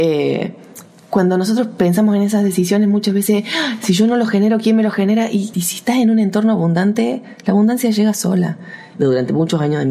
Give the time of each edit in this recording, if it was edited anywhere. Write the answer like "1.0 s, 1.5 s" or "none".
5.5 s, 8.9 s